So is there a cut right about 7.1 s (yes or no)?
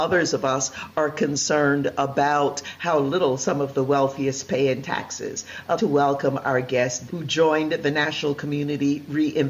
yes